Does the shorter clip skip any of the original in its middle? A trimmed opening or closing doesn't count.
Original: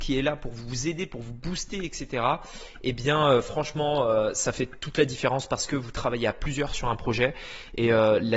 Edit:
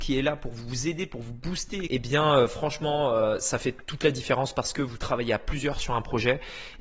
yes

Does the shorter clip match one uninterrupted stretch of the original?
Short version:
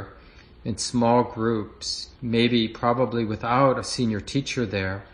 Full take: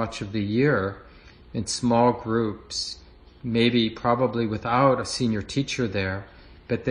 no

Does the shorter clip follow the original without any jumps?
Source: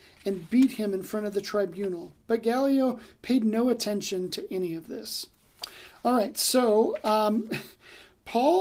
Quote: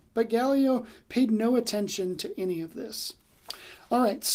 yes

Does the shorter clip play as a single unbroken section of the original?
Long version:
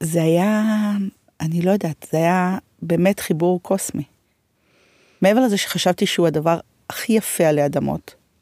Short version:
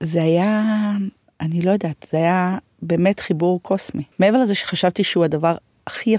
no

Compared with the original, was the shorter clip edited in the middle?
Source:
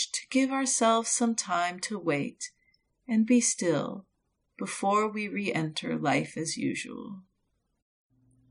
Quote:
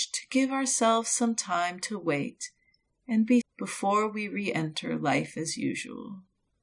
yes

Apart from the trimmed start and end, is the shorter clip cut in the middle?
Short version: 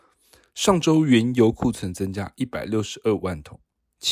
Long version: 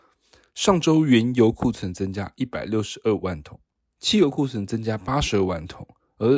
no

